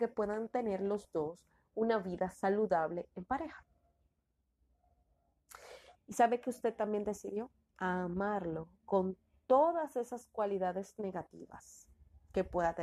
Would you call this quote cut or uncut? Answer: cut